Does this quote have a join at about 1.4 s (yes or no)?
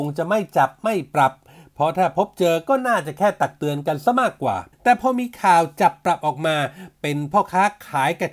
no